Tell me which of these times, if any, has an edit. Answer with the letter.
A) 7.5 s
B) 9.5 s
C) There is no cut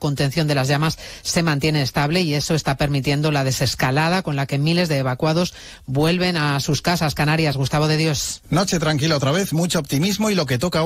C